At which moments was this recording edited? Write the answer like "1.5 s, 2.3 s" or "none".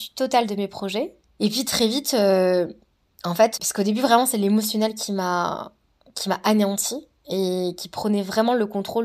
1.3 s, 3.6 s